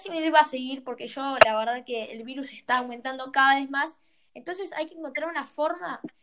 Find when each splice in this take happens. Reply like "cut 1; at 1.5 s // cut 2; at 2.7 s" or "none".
none